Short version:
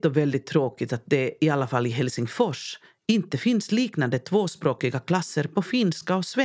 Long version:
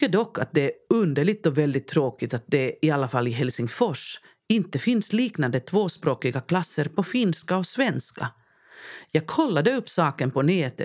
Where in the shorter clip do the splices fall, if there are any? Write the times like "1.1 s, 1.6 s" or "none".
none